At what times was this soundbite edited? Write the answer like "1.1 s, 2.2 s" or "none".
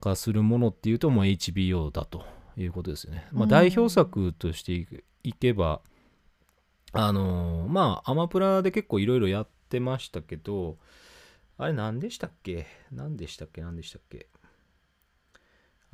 none